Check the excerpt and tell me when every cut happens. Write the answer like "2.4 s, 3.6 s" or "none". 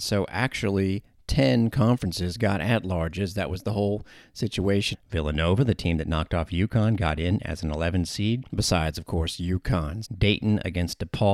4.9 s, 8.5 s, 10.0 s